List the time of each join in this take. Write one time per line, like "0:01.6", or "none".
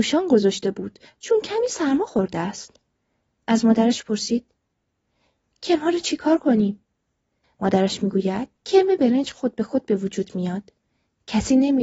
0:07.4
0:08.6